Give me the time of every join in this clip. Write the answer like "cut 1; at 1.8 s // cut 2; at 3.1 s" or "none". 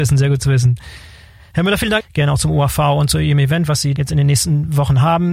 cut 1; at 2.0 s